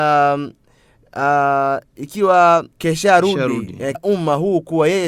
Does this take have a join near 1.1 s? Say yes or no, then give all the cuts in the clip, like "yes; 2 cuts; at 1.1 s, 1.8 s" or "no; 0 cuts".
no; 2 cuts; at 2.7 s, 3.9 s